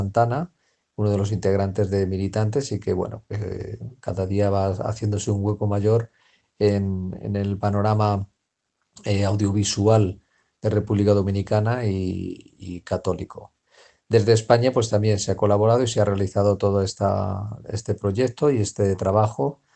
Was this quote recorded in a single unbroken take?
yes; 0 cuts

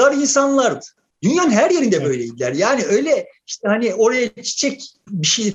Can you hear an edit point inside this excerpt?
no; 0 cuts

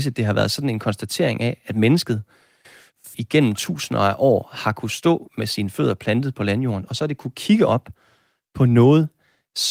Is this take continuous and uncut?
no; 1 cut; at 3.1 s

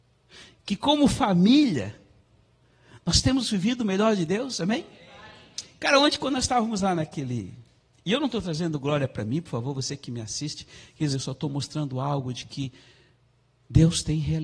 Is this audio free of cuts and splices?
no; 1 cut; at 11.1 s

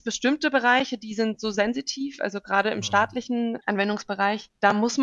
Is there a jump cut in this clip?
no; 0 cuts

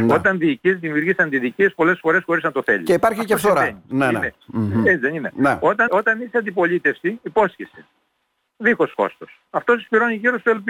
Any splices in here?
yes; 1 cut; at 5.9 s

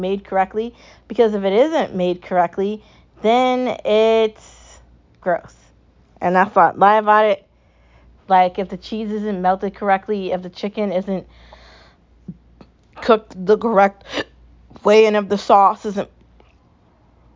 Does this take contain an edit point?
yes; 1 cut; at 8.2 s

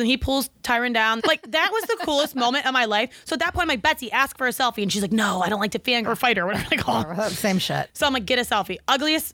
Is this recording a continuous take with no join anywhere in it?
no; 2 cuts; at 1.2 s, 6.1 s

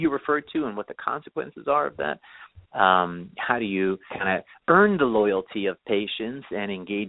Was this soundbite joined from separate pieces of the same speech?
yes; 2 cuts; at 2.6 s, 4.1 s

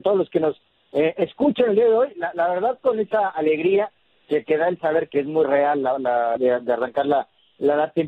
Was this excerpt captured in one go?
no; 2 cuts; at 5.1 s, 6.4 s

